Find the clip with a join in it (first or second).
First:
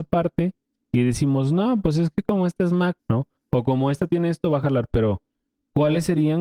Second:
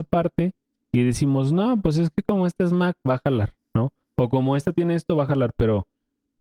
first